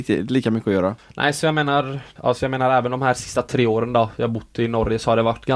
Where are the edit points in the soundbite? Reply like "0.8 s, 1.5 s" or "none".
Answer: 1.0 s, 2.2 s